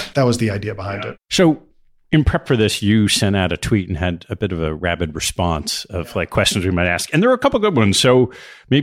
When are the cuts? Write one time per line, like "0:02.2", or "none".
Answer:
0:01.2

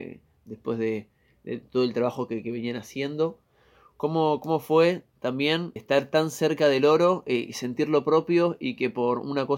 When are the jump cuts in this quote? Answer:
0:05.8

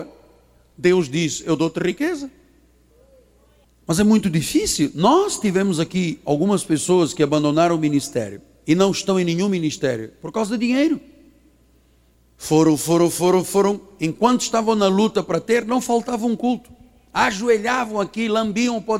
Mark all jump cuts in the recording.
none

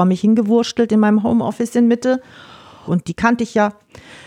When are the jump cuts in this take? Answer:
0:02.9

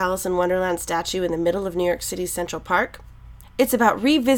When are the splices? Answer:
0:03.4

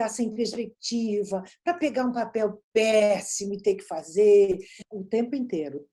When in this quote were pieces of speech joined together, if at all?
0:04.8

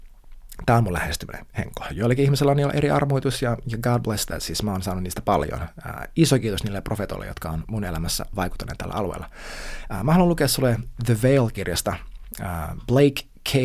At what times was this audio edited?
none

